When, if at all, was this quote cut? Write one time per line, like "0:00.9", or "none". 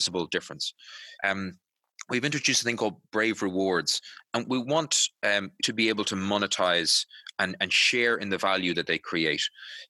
0:01.2
0:05.6